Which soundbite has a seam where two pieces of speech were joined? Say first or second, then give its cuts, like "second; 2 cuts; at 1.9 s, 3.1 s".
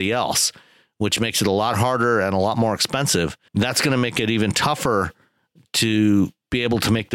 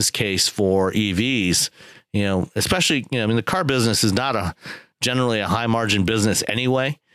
first; 1 cut; at 3.5 s